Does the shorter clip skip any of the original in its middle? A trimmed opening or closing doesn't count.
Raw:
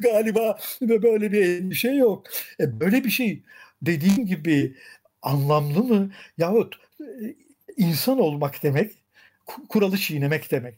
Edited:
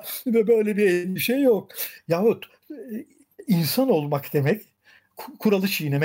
yes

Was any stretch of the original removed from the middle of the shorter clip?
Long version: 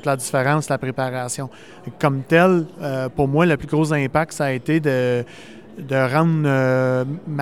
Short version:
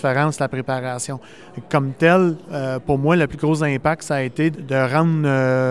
yes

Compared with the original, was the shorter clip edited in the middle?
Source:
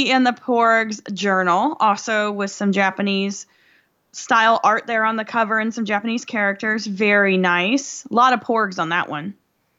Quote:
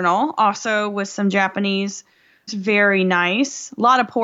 yes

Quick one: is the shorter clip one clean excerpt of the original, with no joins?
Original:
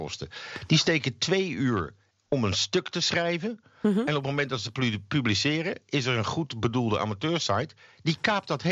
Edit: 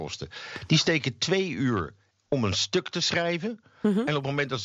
yes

